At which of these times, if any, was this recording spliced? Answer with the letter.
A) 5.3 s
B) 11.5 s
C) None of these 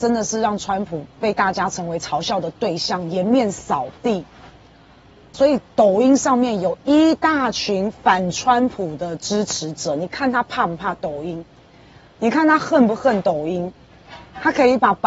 A